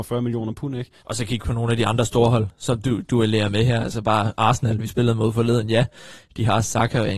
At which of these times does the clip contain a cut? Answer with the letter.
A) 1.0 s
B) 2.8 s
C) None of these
A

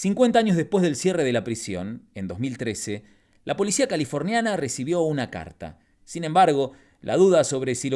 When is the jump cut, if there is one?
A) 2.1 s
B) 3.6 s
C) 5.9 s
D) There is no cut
C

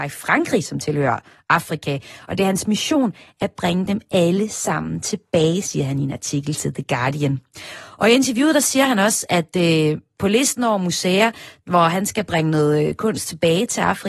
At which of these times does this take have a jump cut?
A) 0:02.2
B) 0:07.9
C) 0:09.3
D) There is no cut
D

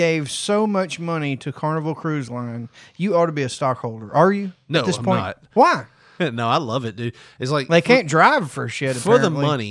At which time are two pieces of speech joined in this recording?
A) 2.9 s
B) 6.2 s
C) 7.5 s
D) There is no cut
B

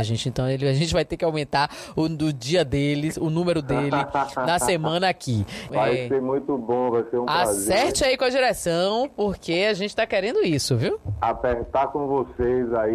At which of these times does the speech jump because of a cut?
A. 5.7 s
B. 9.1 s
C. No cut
A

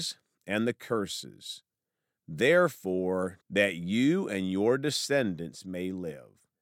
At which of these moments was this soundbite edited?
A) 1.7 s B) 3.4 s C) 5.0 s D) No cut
B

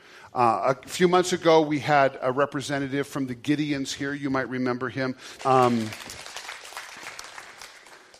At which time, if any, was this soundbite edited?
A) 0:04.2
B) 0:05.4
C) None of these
B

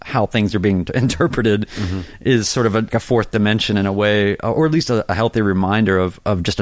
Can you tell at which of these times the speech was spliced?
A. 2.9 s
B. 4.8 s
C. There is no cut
A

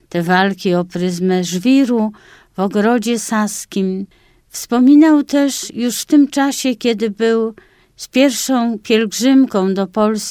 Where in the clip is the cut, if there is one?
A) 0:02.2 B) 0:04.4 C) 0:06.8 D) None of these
D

